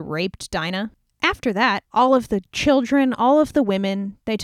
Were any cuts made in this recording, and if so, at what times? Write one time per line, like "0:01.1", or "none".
0:01.9